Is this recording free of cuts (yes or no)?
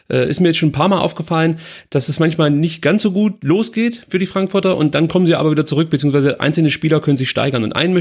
yes